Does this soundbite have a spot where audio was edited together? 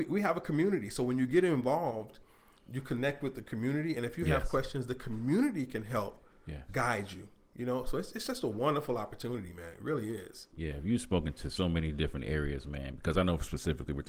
no; 0 cuts

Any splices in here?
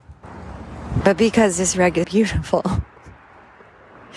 yes; 2 cuts; at 1.0 s, 2.0 s

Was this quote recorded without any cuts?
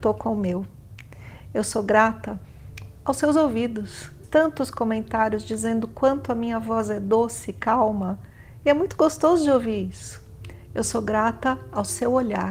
no; 1 cut; at 4.2 s

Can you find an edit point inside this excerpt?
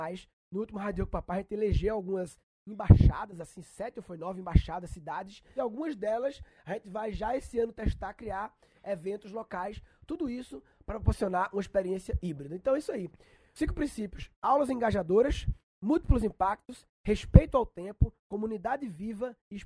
no; 0 cuts

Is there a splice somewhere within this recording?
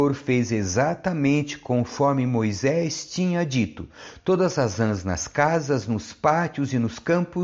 no; 0 cuts

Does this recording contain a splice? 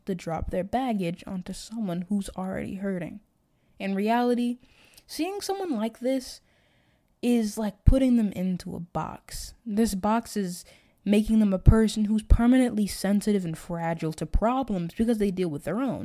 no; 0 cuts

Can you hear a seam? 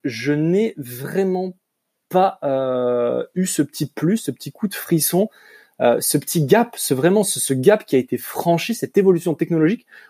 no; 0 cuts

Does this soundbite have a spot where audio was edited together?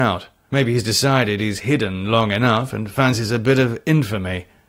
no; 0 cuts

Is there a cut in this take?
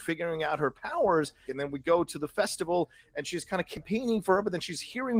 yes; 1 cut; at 1.4 s

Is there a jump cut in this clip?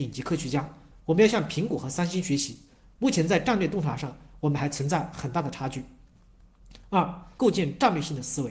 yes; 1 cut; at 7.4 s

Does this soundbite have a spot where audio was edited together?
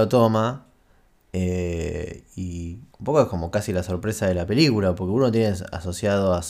yes; 1 cut; at 2.9 s

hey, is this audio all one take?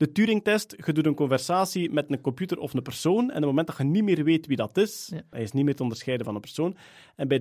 no; 1 cut; at 5.3 s

